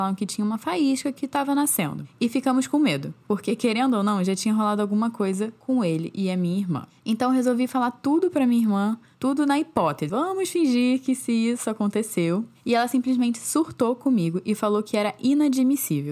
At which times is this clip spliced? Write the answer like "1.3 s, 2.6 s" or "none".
10.1 s

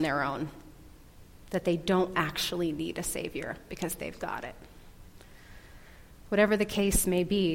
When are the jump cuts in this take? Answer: none

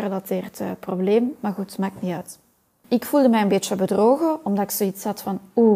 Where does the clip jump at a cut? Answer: 2.8 s

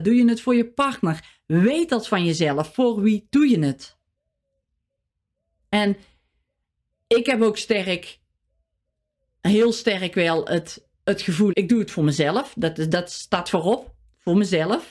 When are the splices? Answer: 11.5 s

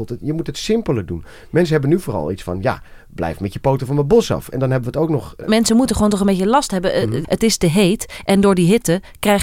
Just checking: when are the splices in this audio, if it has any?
5.4 s, 7.2 s

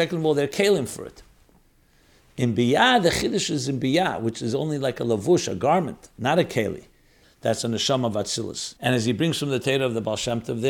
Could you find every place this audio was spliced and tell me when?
7.2 s, 8.8 s

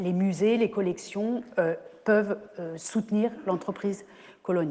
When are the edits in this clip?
none

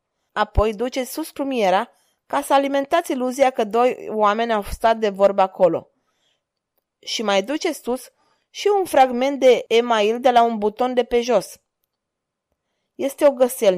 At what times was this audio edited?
none

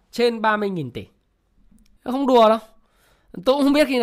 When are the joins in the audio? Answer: 2.0 s

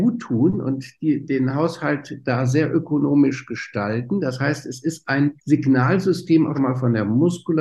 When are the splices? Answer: 5.4 s, 6.5 s

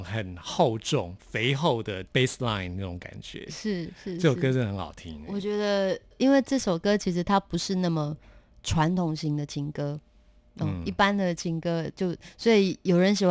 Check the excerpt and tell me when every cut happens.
none

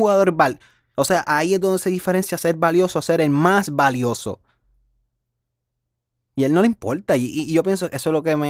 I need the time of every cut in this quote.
0.9 s, 6.1 s

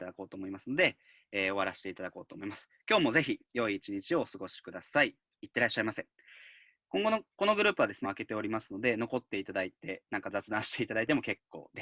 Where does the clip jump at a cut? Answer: 8.0 s

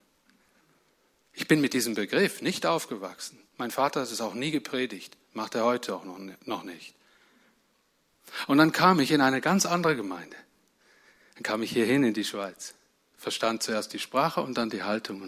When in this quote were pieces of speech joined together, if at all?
none

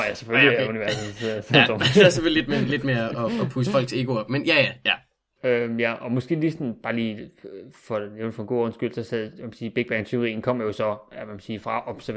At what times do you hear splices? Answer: 5.4 s

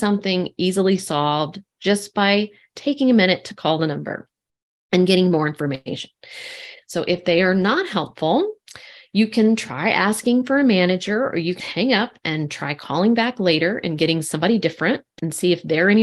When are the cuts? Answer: 6.8 s, 11.6 s

